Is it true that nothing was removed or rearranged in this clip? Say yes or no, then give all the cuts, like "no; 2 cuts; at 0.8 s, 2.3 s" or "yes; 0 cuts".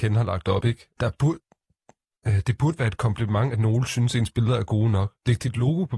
no; 1 cut; at 1.0 s